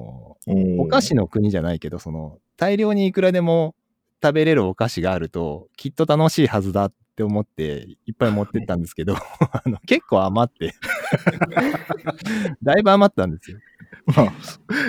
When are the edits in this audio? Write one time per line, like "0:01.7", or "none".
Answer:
none